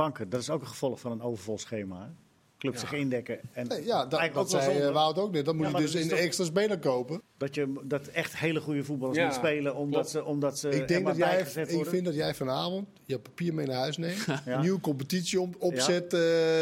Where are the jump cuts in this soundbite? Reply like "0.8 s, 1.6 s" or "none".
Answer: 7.2 s